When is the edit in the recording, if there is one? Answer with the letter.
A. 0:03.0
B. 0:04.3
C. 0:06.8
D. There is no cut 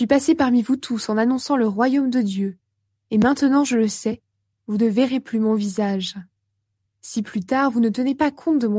C